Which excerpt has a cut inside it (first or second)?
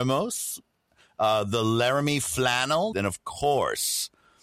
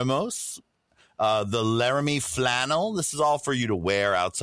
first